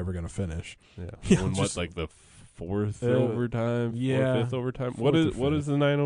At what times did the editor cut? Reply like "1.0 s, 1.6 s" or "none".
1.2 s